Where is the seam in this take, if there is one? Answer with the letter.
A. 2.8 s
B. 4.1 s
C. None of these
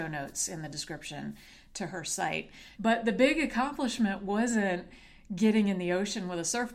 A